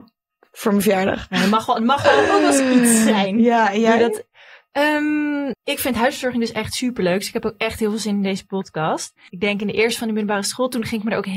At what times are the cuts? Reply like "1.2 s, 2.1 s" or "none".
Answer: 5.5 s, 9.3 s